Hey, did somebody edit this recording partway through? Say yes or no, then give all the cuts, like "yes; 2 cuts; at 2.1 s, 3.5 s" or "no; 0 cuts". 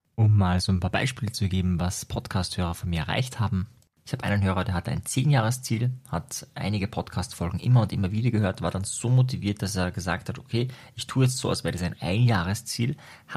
no; 0 cuts